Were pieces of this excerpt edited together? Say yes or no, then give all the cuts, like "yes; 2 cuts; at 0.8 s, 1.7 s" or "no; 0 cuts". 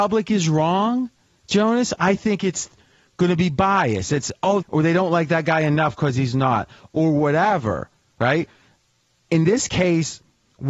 yes; 1 cut; at 4.6 s